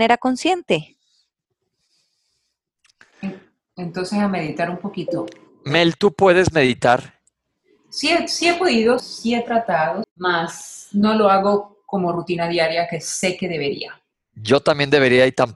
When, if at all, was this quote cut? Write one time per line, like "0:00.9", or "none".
0:09.0
0:10.0